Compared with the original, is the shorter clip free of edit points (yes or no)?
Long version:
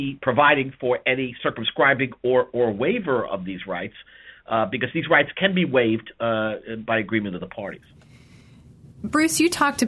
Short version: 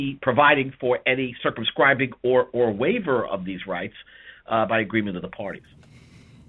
no